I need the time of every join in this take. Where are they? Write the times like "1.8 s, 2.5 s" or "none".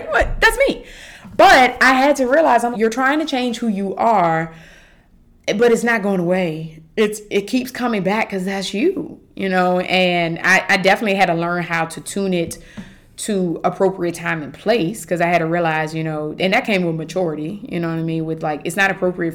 2.7 s